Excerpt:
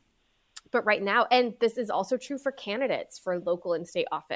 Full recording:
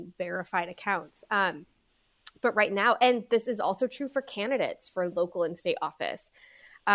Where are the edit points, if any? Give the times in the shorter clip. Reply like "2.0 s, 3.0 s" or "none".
none